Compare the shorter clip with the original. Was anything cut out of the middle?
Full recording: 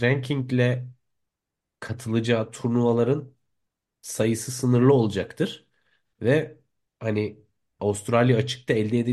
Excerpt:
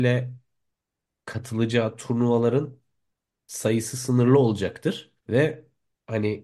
yes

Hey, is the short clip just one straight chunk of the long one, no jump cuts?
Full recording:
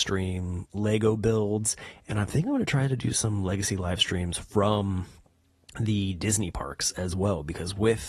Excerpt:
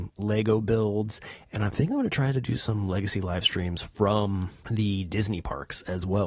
no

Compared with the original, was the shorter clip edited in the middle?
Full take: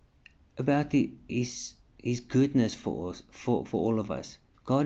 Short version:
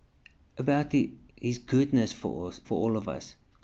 yes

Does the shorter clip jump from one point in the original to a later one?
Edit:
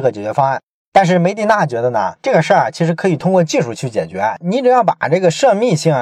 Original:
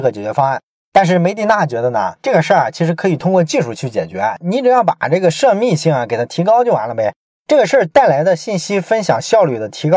no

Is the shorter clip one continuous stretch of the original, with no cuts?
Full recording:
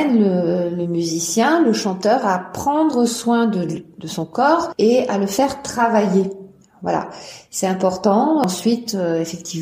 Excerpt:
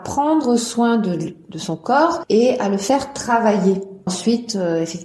no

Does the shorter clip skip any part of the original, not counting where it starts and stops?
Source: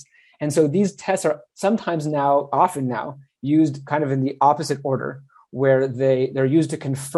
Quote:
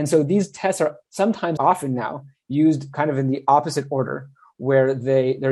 yes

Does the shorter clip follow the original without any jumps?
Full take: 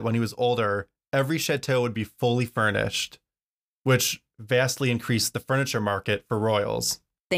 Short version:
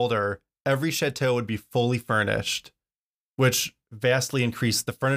yes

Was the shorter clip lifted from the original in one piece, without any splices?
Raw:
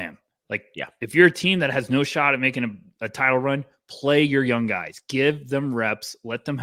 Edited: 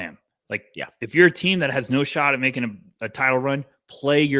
yes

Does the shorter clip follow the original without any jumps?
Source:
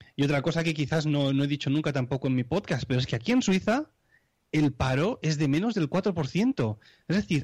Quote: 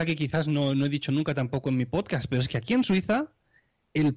yes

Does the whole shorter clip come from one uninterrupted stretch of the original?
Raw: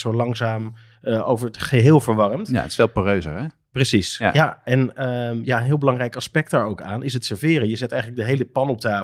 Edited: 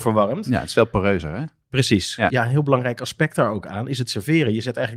no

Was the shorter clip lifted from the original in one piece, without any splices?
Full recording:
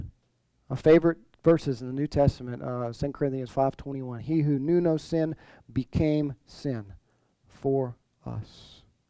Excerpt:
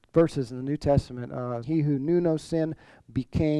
no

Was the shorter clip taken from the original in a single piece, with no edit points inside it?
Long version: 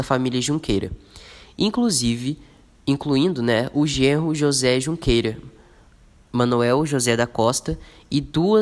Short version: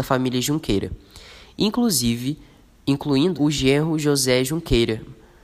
no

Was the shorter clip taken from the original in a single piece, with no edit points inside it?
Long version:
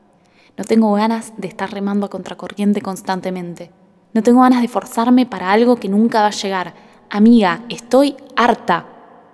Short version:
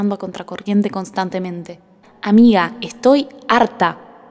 no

